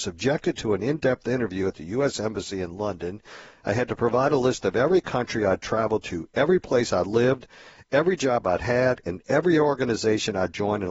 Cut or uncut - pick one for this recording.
uncut